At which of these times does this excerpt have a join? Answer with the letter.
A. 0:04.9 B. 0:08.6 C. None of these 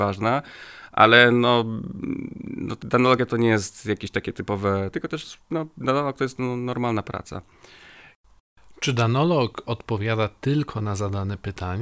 A